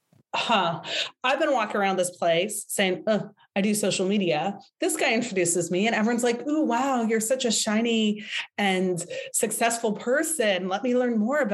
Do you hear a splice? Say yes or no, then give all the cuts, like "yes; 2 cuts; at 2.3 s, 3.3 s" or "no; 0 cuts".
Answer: no; 0 cuts